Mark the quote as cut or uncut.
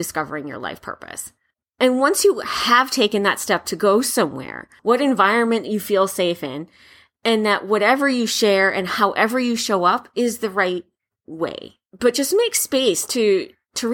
cut